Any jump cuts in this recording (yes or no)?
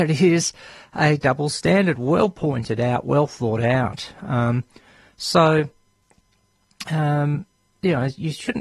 no